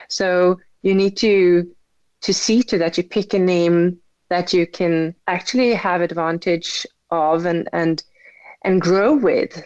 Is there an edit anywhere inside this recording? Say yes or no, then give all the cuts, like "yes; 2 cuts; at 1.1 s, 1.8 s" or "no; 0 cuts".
yes; 1 cut; at 5.2 s